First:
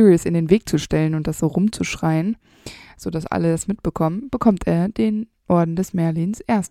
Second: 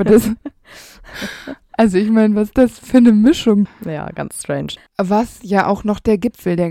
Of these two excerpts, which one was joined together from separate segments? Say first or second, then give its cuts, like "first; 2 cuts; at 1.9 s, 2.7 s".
second; 2 cuts; at 3.7 s, 4.8 s